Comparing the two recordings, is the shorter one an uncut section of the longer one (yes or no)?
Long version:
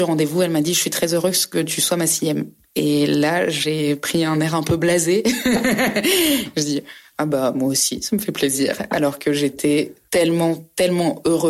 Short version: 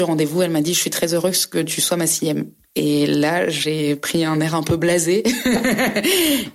yes